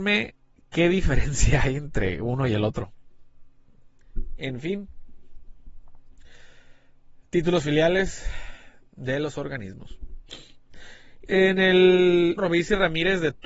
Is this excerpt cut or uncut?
cut